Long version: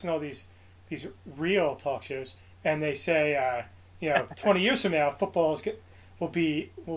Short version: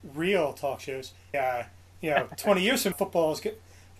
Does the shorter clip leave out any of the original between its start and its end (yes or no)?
yes